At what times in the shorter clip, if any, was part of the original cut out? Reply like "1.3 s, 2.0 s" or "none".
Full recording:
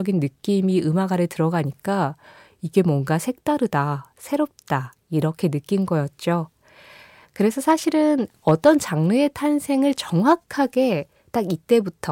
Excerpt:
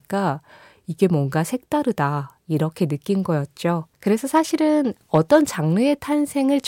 2.4 s, 3.9 s